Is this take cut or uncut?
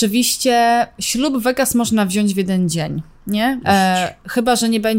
cut